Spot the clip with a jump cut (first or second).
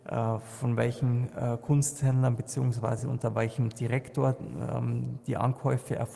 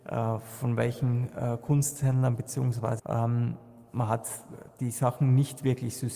second